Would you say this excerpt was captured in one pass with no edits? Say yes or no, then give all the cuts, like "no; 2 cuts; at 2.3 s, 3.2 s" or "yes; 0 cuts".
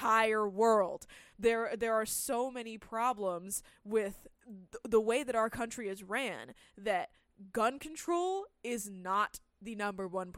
no; 2 cuts; at 1.3 s, 4.4 s